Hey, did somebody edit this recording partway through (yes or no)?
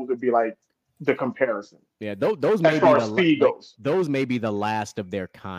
no